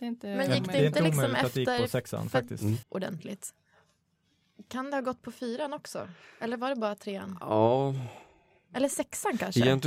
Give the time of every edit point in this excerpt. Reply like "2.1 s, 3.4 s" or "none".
2.8 s